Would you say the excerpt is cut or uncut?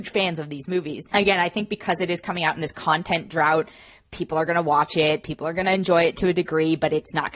uncut